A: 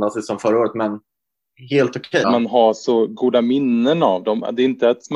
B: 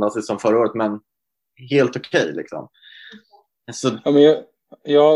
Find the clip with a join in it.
A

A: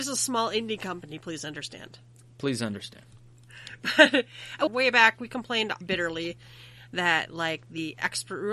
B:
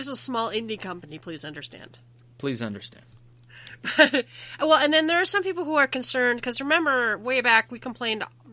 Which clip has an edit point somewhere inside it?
A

